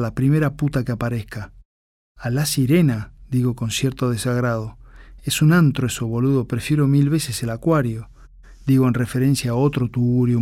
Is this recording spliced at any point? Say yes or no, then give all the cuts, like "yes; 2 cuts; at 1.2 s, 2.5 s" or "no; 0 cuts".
no; 0 cuts